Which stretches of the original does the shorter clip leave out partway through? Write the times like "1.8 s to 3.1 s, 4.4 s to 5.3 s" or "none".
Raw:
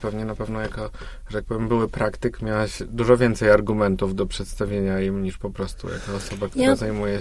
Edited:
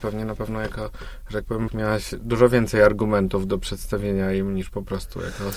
1.7 s to 2.4 s